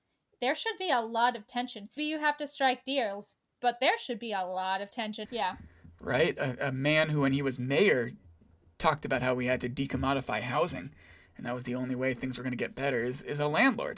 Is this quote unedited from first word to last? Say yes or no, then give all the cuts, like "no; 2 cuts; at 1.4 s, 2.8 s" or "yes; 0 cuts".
no; 2 cuts; at 2.0 s, 5.2 s